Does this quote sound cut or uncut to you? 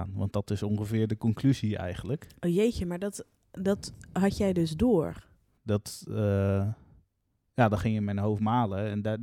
cut